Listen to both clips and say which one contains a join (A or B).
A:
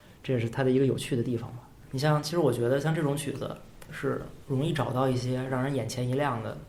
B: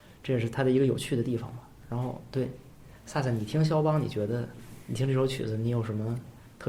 A